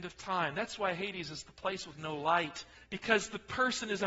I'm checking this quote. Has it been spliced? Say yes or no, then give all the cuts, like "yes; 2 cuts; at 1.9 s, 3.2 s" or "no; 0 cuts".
yes; 1 cut; at 2.7 s